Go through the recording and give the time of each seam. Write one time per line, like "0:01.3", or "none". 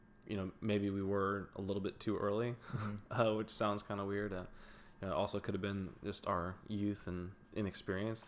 none